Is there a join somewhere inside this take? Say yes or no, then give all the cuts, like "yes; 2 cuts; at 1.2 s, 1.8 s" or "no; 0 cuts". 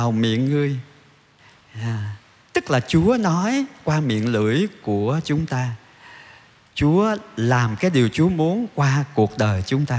no; 0 cuts